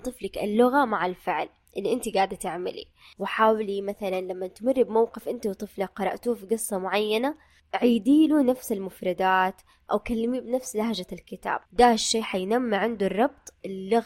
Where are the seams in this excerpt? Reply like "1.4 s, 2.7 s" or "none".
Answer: 11.7 s